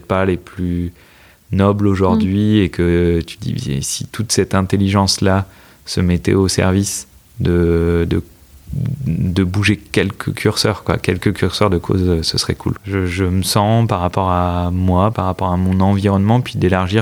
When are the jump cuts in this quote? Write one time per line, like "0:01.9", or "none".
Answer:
0:12.8
0:15.1